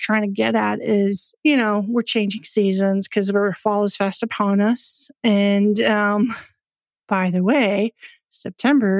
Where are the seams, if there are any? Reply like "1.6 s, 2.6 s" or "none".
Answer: 1.4 s